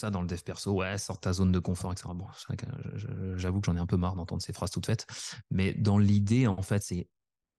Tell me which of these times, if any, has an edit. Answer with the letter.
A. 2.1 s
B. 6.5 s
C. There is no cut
C